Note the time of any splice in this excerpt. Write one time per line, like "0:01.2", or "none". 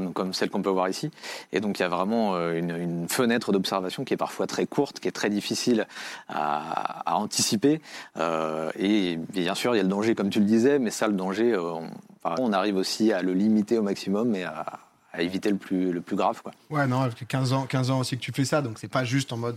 0:12.4